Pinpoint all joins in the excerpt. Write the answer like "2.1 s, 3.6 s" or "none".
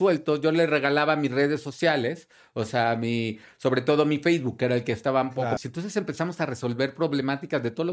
5.6 s